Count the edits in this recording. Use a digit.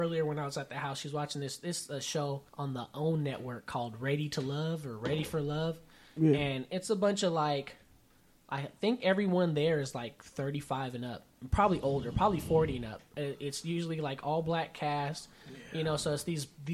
1